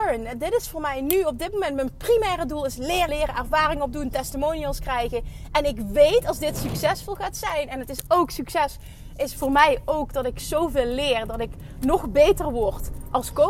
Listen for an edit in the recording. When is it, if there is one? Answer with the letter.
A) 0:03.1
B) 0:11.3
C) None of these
A